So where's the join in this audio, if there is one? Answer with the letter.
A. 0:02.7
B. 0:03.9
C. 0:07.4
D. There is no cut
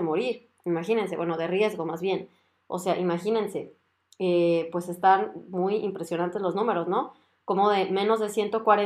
D